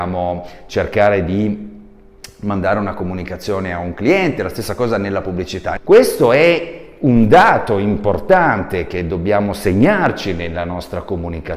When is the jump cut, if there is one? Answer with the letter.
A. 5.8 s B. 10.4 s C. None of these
A